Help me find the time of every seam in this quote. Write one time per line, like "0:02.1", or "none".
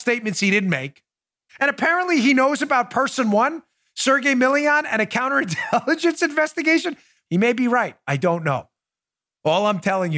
0:01.5
0:07.3